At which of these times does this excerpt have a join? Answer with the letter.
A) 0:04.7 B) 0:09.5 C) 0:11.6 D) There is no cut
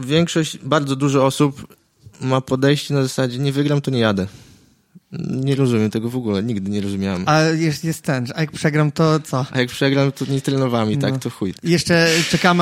C